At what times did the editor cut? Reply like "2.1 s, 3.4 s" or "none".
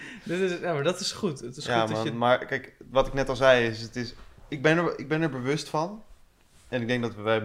none